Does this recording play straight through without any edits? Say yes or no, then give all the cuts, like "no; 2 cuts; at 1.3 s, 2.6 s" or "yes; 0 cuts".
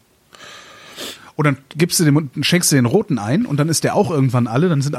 yes; 0 cuts